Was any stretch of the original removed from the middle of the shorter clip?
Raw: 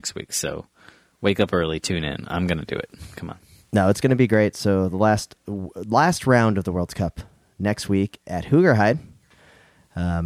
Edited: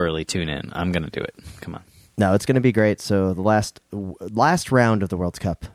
no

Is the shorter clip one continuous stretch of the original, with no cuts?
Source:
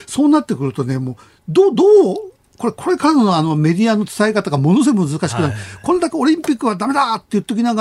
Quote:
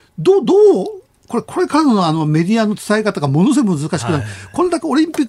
yes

